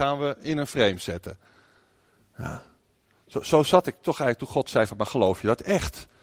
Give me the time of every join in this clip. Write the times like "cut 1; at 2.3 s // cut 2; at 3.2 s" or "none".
none

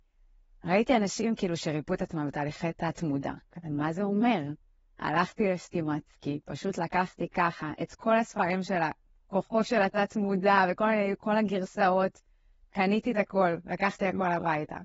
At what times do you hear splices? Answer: none

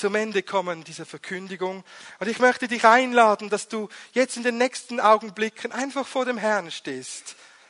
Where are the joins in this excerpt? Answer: none

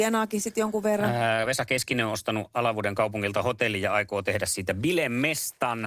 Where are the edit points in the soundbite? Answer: none

